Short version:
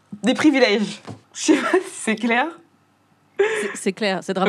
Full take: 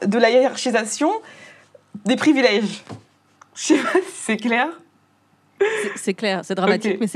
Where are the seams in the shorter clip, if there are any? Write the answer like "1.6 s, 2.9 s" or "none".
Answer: 1.2 s